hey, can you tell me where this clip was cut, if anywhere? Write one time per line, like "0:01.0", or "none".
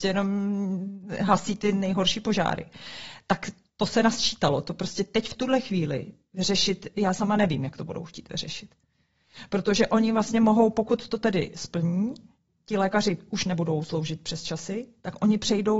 none